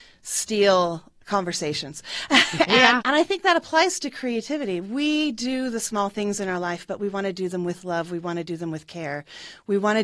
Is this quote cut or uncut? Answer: cut